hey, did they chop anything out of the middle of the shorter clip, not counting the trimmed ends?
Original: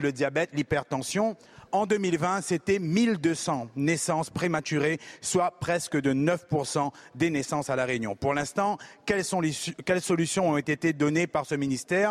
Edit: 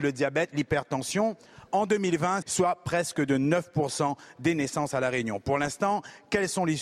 yes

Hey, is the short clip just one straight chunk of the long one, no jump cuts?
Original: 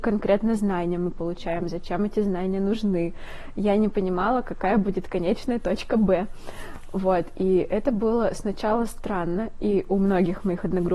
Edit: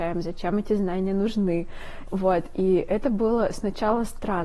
no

